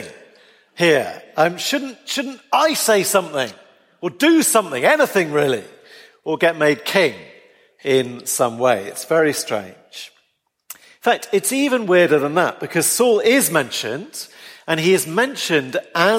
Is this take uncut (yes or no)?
yes